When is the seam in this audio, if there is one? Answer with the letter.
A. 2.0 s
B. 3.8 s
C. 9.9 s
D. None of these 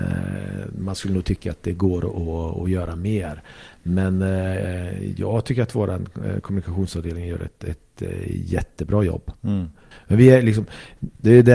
C